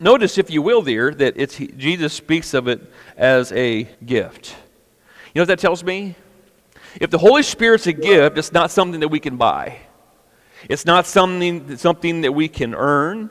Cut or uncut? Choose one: cut